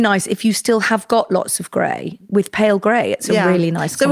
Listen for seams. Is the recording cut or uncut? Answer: uncut